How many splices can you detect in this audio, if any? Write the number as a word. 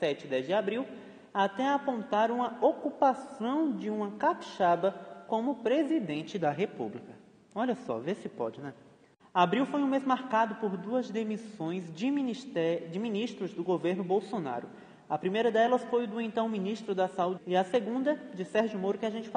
two